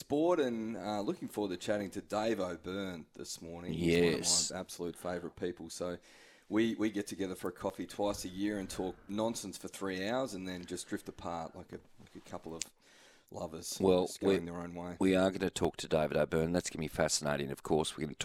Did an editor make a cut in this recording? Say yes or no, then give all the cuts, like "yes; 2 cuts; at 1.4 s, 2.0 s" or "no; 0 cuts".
no; 0 cuts